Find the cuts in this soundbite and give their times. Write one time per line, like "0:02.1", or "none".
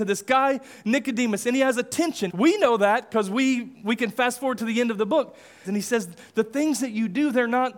0:02.3
0:05.6